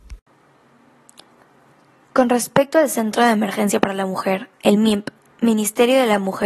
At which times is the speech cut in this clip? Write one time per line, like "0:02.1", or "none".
none

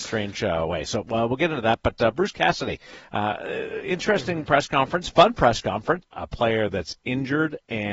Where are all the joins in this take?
0:06.0

